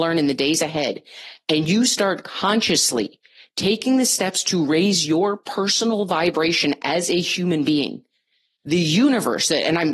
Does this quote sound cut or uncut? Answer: uncut